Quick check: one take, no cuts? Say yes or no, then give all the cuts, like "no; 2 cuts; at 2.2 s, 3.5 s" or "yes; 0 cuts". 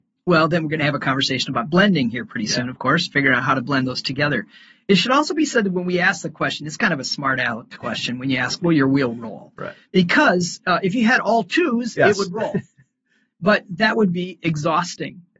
yes; 0 cuts